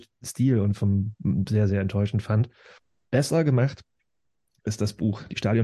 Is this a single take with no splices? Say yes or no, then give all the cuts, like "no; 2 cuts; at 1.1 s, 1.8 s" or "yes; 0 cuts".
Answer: yes; 0 cuts